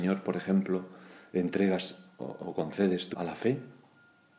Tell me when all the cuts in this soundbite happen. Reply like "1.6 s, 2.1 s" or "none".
3.1 s